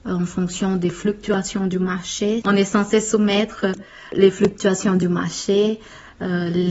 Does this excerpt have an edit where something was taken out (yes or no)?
yes